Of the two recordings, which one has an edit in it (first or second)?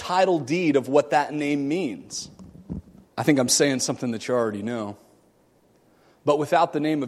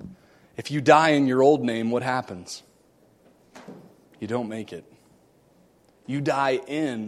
first